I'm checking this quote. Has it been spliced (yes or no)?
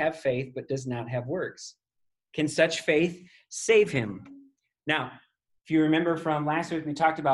no